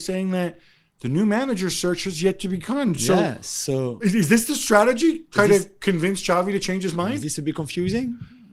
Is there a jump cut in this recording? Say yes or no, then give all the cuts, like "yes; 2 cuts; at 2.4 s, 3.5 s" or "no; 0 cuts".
no; 0 cuts